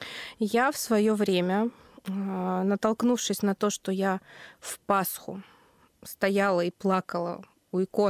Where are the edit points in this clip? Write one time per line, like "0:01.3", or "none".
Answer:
none